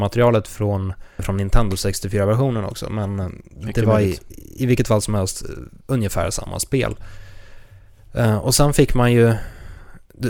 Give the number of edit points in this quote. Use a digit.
1